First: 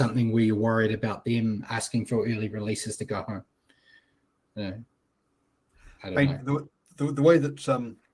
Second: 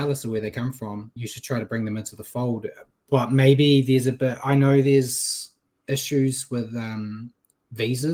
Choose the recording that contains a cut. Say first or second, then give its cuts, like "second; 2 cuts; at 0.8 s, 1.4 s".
second; 1 cut; at 1.2 s